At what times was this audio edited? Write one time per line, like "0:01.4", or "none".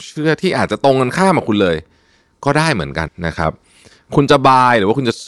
0:03.1